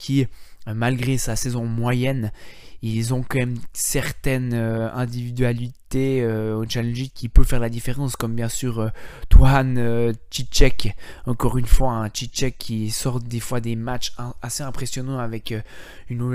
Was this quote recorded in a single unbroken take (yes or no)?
yes